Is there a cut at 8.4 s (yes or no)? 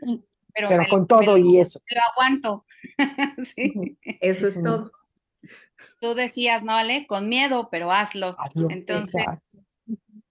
no